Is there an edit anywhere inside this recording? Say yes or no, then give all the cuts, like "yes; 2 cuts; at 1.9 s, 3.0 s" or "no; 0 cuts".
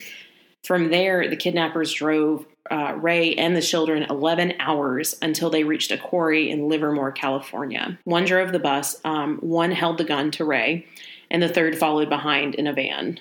yes; 1 cut; at 8.0 s